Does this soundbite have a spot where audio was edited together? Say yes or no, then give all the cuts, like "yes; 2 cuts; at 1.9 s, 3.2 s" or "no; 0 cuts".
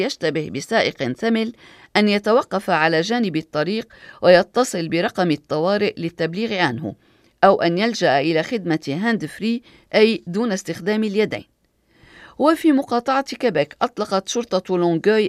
no; 0 cuts